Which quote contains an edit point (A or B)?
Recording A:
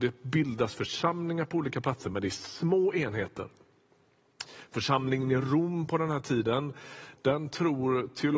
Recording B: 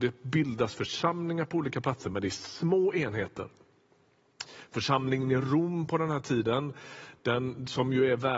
A